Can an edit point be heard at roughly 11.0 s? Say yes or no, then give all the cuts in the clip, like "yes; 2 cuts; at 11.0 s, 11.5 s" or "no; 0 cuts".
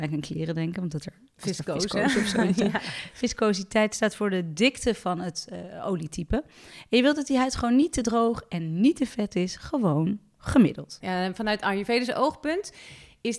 yes; 1 cut; at 11.0 s